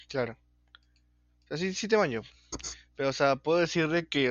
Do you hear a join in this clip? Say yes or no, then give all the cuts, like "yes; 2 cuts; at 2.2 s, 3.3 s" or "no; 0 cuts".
no; 0 cuts